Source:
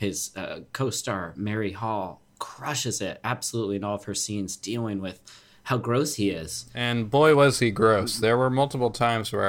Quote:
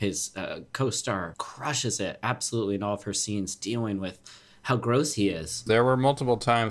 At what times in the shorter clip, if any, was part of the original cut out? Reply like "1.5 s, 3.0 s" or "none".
1.3 s, 5.7 s

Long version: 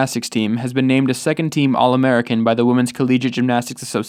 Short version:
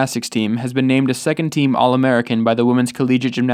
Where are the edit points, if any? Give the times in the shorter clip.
none

